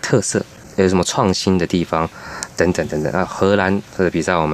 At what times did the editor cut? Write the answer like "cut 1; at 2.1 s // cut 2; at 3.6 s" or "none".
none